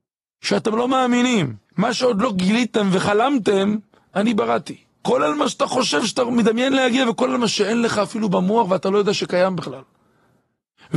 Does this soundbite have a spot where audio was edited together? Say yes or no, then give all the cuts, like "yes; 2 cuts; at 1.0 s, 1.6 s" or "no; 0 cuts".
yes; 2 cuts; at 1.7 s, 5.0 s